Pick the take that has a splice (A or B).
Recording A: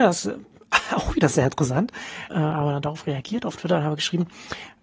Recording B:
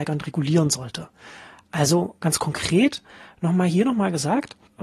A